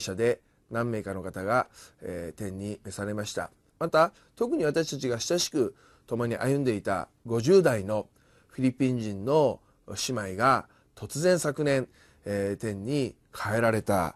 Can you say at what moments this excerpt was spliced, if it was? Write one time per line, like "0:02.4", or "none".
0:03.7